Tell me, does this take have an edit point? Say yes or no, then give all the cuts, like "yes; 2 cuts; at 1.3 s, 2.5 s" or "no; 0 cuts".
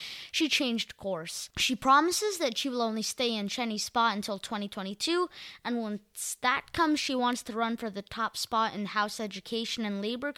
no; 0 cuts